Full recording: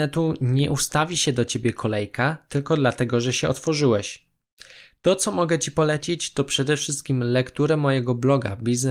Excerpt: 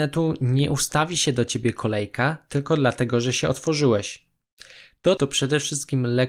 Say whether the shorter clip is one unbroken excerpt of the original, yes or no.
no